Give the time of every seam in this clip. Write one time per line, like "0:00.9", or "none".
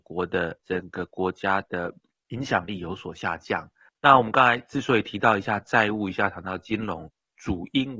0:03.9